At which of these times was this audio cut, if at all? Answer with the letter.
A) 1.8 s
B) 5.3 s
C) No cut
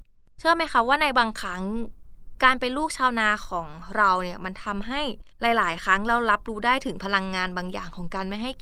B